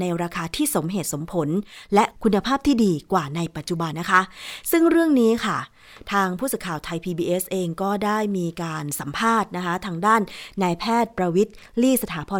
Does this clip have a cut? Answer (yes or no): yes